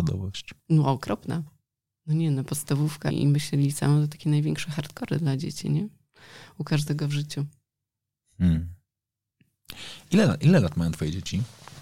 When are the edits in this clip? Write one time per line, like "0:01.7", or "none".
0:03.1